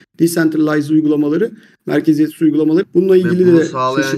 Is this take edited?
yes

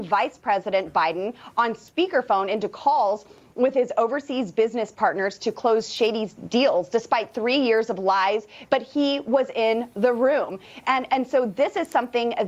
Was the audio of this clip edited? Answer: yes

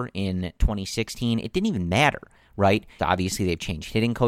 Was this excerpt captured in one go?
no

